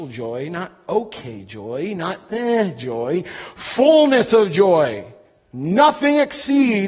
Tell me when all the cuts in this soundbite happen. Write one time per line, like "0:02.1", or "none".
none